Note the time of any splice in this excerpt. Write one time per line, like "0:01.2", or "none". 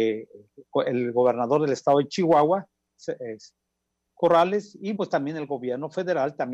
0:05.0